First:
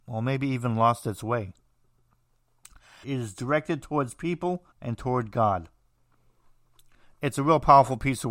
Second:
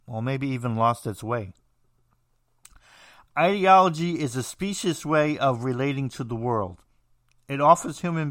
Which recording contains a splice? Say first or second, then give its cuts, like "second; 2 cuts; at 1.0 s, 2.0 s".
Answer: first; 2 cuts; at 3.0 s, 4.7 s